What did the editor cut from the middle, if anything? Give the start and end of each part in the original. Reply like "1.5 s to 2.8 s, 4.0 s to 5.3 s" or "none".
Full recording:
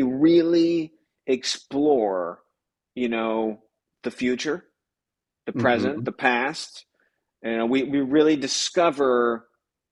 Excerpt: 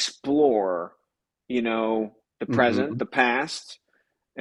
3.7 s to 5.3 s